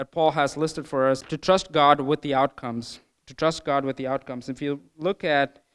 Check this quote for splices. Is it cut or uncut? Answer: cut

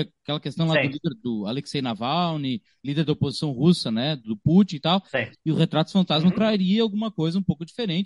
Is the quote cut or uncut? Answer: cut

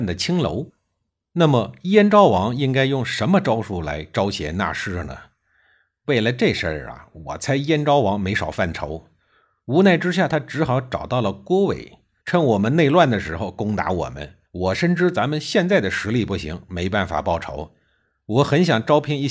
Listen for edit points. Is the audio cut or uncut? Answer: cut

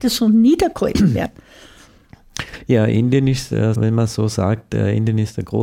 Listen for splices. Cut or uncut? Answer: cut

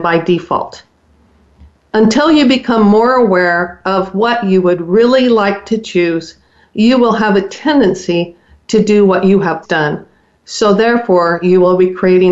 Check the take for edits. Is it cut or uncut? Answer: cut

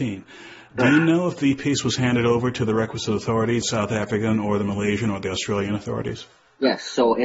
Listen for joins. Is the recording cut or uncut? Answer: cut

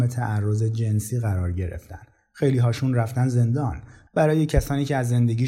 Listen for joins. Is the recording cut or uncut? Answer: uncut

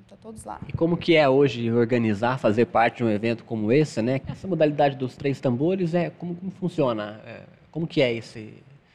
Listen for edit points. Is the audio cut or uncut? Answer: cut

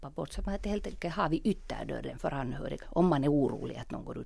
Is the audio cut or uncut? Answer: cut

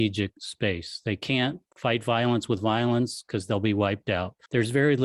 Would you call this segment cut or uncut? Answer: uncut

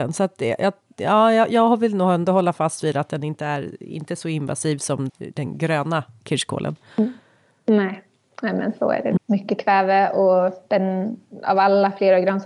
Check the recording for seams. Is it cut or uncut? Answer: cut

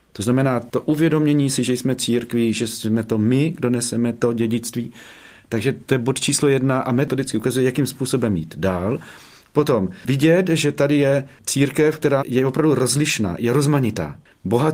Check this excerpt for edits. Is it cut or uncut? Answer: uncut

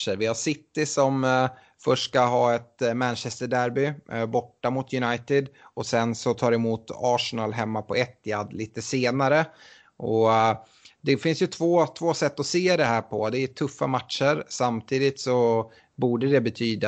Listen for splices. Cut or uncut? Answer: uncut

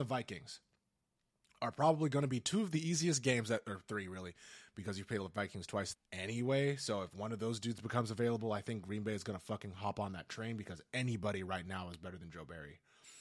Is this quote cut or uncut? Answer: cut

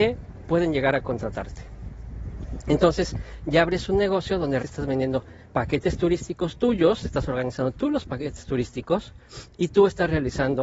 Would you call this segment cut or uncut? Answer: cut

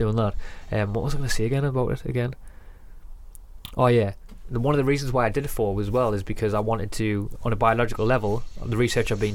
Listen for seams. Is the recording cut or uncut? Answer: uncut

